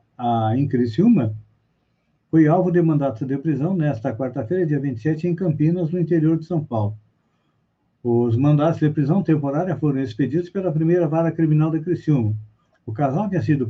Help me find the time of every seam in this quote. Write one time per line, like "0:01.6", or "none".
0:12.7